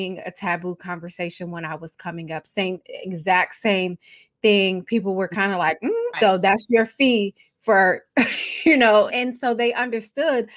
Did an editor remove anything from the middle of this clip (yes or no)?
yes